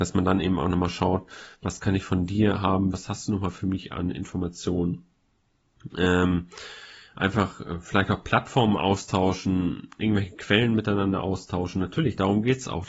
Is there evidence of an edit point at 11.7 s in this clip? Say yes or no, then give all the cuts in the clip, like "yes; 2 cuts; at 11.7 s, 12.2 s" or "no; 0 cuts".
no; 2 cuts; at 2.9 s, 5.9 s